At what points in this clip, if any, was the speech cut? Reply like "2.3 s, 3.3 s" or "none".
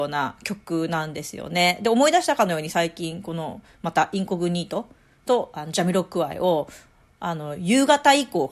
none